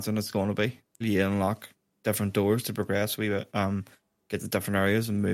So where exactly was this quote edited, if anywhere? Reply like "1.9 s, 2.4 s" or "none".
1.0 s